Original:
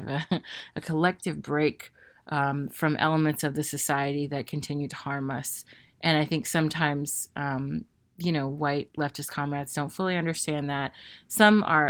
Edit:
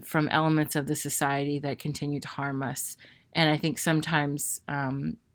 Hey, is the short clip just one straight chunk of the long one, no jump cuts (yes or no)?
yes